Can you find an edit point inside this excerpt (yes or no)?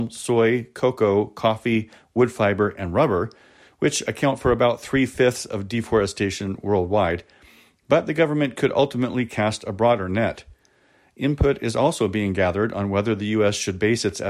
no